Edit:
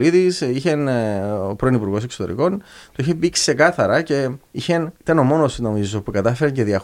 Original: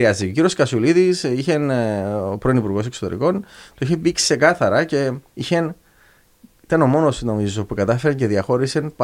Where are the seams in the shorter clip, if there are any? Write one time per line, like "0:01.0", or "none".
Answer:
0:05.0